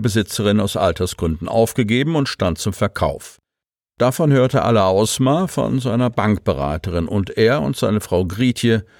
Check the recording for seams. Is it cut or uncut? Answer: uncut